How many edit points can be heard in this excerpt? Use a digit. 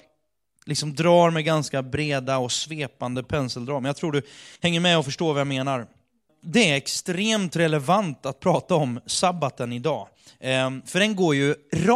2